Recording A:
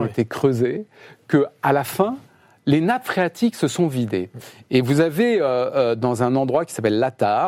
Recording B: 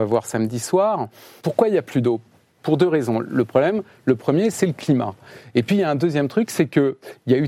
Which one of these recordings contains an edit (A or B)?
B